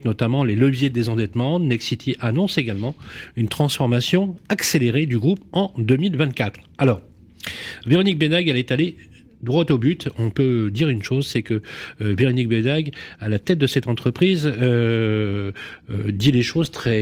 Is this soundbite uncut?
yes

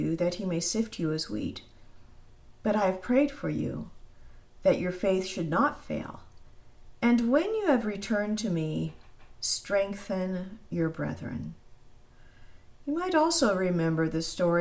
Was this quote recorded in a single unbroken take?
yes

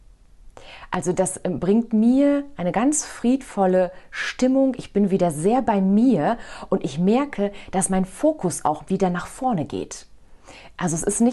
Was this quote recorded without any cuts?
yes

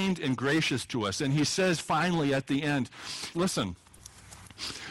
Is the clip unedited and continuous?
no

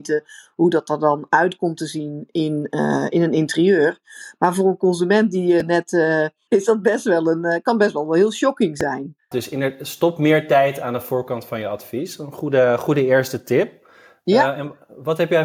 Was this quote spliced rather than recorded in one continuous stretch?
yes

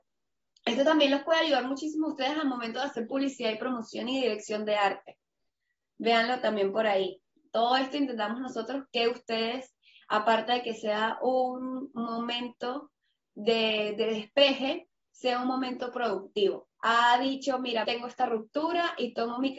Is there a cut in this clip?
yes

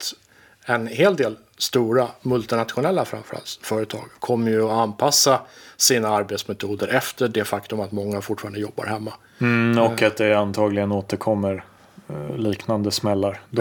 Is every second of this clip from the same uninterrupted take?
yes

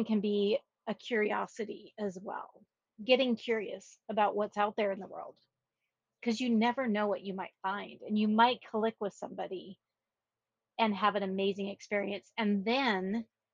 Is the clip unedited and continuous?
yes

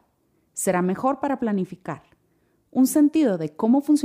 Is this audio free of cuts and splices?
yes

